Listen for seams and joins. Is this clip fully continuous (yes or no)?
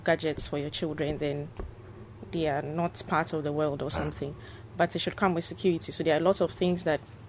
yes